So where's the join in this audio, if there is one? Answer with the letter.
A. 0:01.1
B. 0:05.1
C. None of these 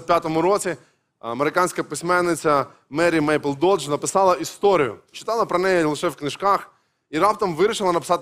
B